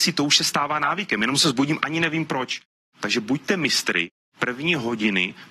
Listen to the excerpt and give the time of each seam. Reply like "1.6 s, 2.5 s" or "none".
2.9 s